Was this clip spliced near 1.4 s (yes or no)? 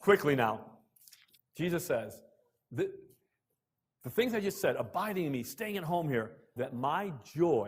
yes